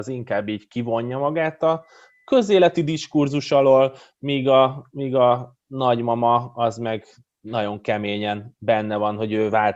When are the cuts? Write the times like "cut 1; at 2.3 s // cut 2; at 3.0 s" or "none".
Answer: none